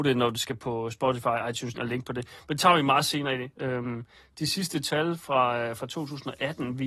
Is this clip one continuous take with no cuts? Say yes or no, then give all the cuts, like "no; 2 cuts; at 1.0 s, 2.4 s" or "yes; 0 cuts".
no; 2 cuts; at 1.7 s, 3.5 s